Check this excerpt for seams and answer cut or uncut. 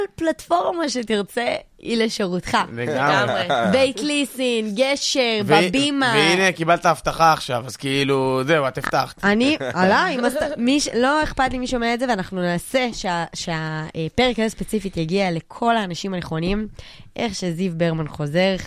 uncut